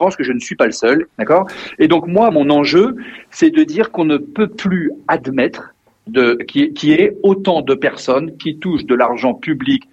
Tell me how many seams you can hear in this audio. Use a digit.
2